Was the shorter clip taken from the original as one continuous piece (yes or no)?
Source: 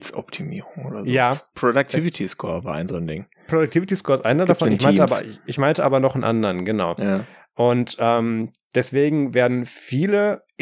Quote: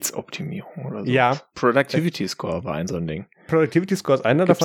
yes